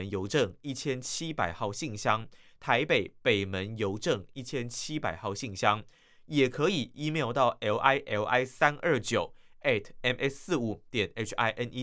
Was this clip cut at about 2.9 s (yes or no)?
no